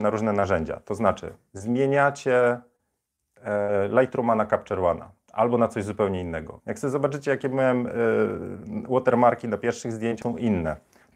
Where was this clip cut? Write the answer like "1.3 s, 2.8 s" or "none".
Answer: 6.6 s, 10.2 s